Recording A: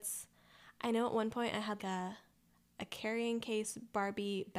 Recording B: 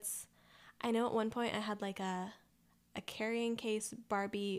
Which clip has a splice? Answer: A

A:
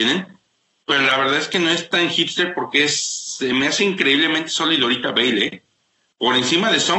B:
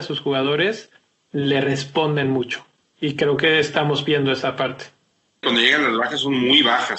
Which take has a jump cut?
B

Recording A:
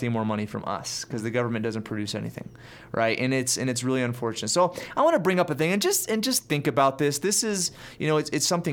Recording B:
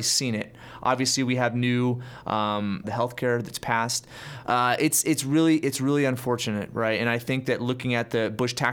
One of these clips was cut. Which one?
B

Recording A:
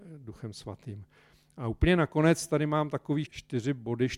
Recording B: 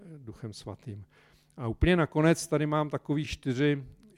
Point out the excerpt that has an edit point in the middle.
A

